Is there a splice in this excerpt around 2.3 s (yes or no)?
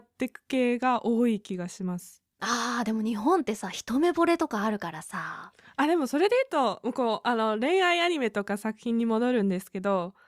yes